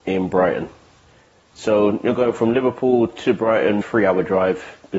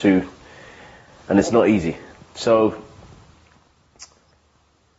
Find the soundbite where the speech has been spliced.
first; 1 cut; at 3.8 s

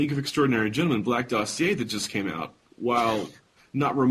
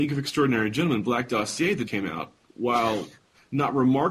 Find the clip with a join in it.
second; 1 cut; at 1.9 s

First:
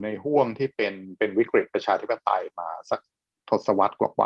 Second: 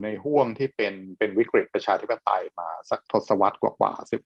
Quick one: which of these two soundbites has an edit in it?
second; 1 cut; at 3.0 s

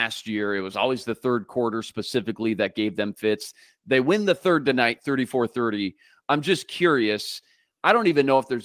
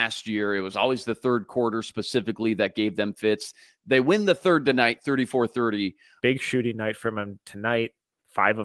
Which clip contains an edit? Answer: second; 1 cut; at 6.2 s

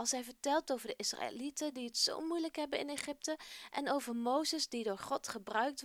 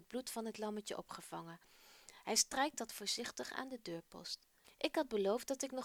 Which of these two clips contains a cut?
second; 1 cut; at 4.6 s

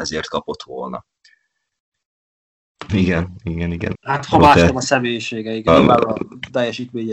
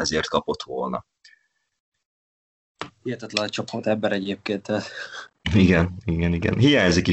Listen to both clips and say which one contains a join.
first; 3 cuts; at 2.9 s, 3.9 s, 5.7 s

